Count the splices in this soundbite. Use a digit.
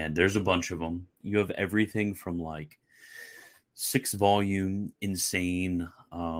1